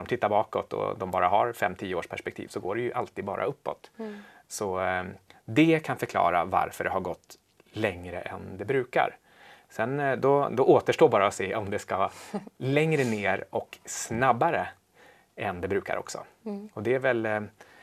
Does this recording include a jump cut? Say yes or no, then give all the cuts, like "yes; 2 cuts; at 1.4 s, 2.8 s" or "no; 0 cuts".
no; 0 cuts